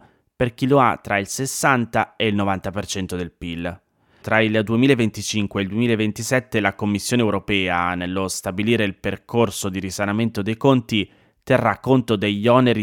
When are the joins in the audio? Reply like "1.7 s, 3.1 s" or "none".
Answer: 4.2 s